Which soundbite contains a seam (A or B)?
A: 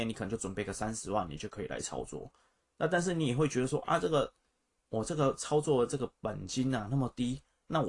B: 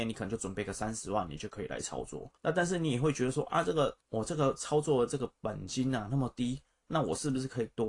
B